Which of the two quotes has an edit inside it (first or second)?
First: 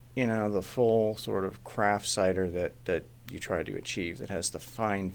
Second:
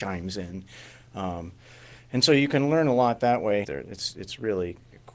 second